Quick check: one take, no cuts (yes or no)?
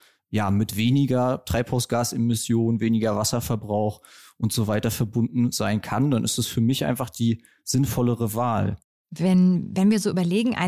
yes